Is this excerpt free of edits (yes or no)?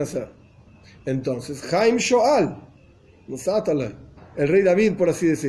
yes